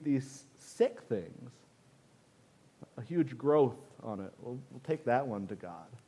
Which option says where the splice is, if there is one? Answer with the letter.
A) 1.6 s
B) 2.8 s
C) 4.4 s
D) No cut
B